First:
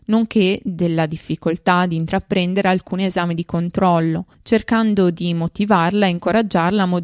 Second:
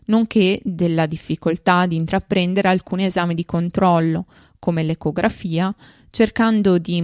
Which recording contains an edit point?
first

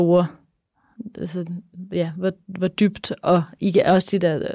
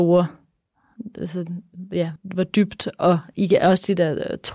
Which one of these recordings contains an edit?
second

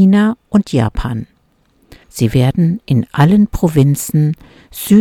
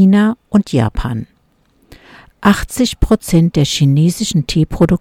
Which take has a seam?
first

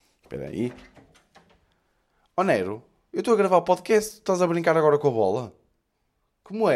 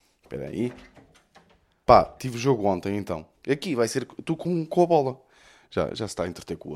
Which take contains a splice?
second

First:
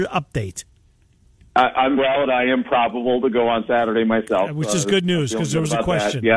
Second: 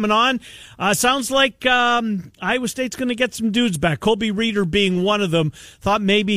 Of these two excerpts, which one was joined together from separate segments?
first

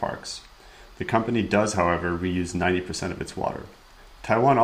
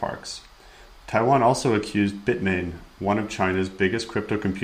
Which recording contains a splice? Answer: second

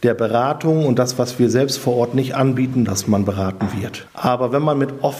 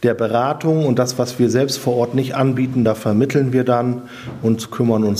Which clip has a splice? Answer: first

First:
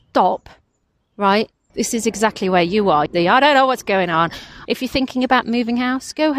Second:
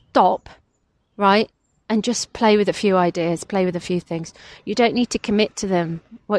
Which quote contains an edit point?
first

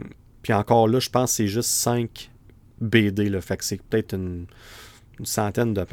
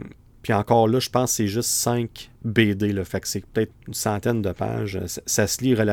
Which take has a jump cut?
second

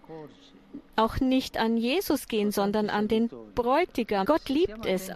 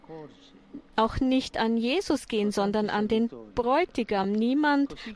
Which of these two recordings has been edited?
first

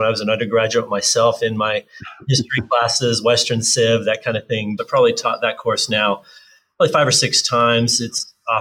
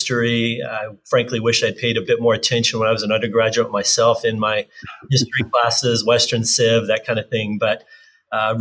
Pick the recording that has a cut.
first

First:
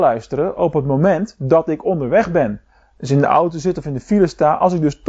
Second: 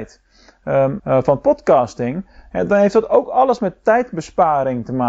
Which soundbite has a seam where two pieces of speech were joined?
second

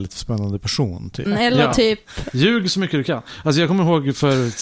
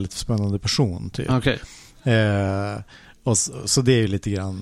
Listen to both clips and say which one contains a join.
first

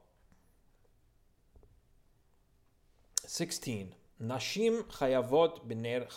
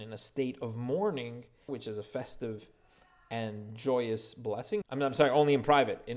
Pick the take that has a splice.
second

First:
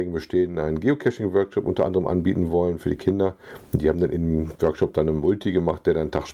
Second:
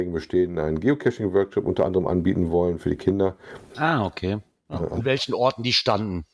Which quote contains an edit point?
second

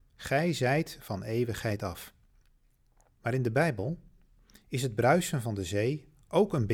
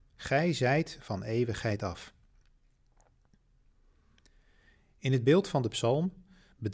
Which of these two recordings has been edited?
first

